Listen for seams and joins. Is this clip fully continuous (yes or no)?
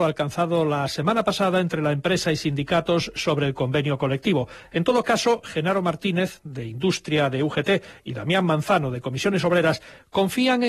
yes